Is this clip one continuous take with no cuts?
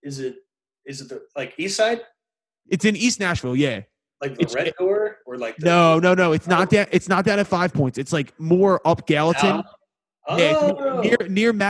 yes; 0 cuts

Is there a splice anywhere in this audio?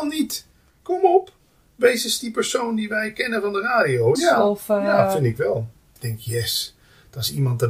yes; 2 cuts; at 4.1 s, 6.0 s

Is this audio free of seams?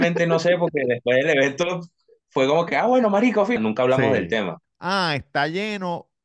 no; 2 cuts; at 3.6 s, 4.6 s

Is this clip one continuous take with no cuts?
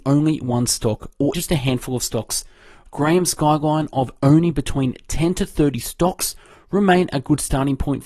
no; 1 cut; at 1.3 s

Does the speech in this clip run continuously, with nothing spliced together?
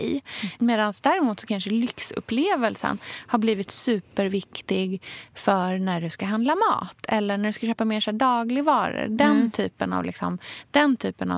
yes; 0 cuts

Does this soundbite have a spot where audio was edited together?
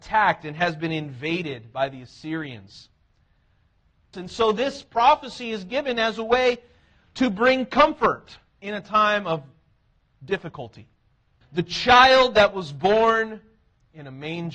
yes; 2 cuts; at 4.1 s, 11.4 s

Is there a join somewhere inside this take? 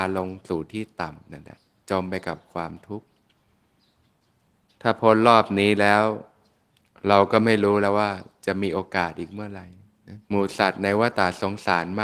yes; 1 cut; at 10.2 s

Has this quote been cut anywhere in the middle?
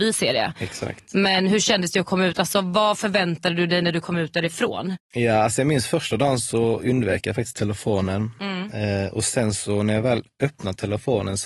no; 0 cuts

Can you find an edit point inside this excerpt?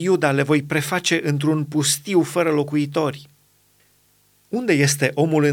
no; 0 cuts

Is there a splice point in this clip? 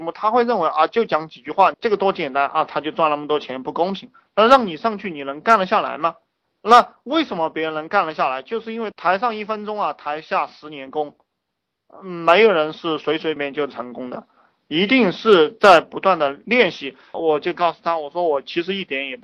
yes; 2 cuts; at 13.4 s, 17.1 s

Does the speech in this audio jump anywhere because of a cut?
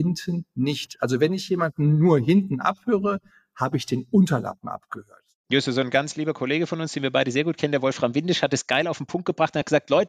no; 0 cuts

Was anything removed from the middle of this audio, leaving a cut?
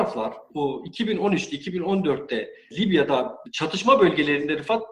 no; 0 cuts

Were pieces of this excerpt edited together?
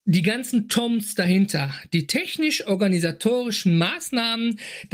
no; 0 cuts

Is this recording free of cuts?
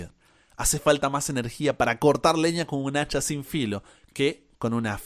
yes; 0 cuts

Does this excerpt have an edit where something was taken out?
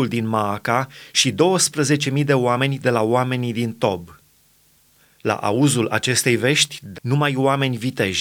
yes; 1 cut; at 6.9 s

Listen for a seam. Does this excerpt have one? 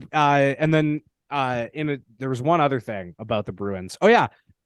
no; 0 cuts

